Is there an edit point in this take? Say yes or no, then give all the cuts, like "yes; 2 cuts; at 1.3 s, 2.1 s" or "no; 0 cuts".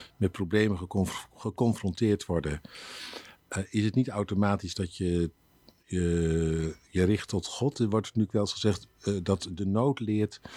no; 0 cuts